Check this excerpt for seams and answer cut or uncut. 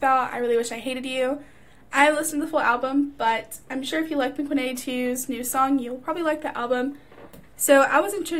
cut